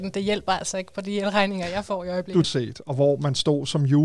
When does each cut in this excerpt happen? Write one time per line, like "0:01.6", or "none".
0:02.4